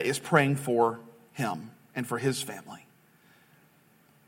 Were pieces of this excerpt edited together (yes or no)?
no